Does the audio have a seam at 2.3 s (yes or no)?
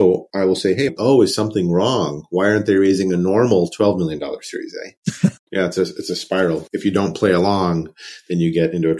no